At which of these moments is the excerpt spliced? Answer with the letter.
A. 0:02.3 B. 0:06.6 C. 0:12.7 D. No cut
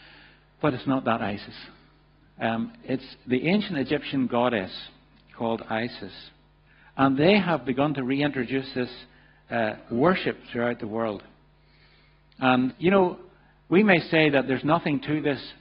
C